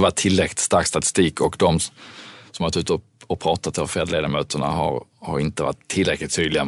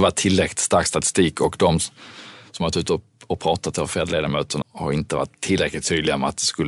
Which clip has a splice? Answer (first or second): second